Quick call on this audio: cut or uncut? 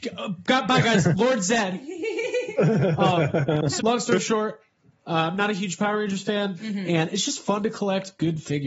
cut